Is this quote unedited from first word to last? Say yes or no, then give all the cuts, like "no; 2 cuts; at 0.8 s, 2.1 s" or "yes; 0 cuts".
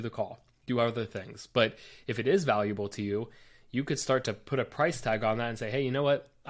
yes; 0 cuts